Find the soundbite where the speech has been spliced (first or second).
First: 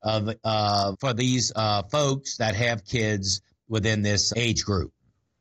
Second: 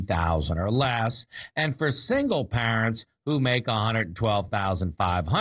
first